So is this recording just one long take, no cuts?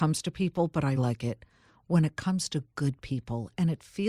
no; 1 cut; at 1.0 s

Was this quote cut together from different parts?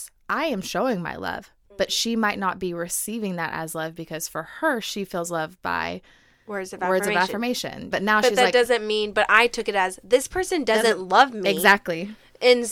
yes; 1 cut; at 7.9 s

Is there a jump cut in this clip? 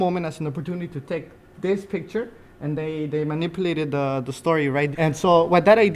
yes; 1 cut; at 4.9 s

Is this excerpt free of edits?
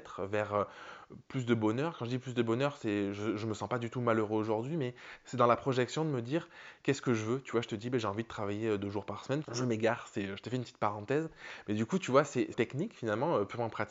no; 2 cuts; at 9.4 s, 12.5 s

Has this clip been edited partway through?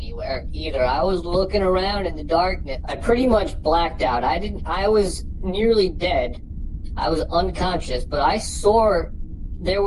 yes; 1 cut; at 2.8 s

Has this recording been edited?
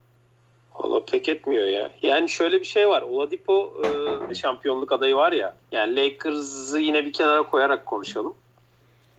yes; 2 cuts; at 4.3 s, 5.6 s

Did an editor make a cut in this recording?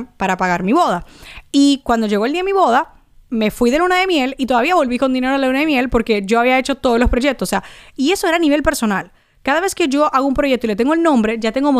no; 0 cuts

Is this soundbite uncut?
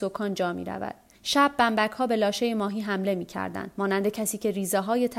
no; 1 cut; at 1.2 s

